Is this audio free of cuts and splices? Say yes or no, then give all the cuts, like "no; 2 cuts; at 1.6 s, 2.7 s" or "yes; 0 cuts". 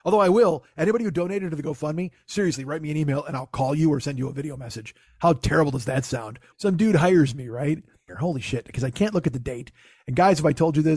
no; 2 cuts; at 6.5 s, 8.1 s